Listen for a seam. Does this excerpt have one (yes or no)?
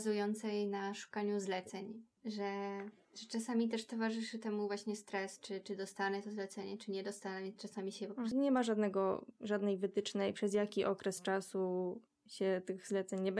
yes